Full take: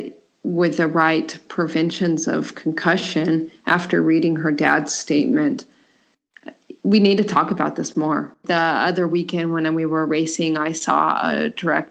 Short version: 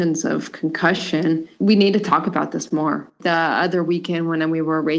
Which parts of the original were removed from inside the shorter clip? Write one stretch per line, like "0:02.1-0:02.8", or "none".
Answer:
0:03.6-0:06.8